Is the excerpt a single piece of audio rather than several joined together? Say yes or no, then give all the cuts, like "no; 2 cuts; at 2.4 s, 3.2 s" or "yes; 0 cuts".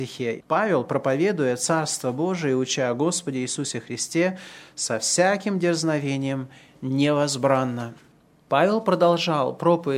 yes; 0 cuts